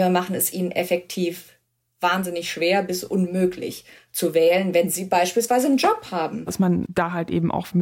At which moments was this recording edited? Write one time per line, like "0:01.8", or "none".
0:06.5